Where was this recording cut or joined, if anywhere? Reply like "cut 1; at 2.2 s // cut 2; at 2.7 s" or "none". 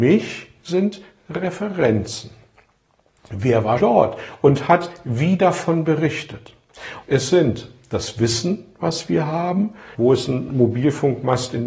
cut 1; at 3.8 s // cut 2; at 7.0 s // cut 3; at 9.9 s